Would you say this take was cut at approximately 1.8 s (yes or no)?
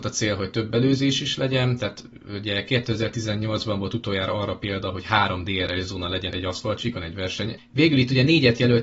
no